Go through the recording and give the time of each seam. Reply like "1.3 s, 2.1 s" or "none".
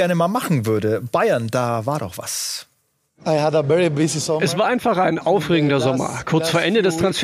none